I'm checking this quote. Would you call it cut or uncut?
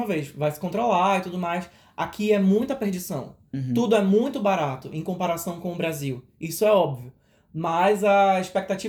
uncut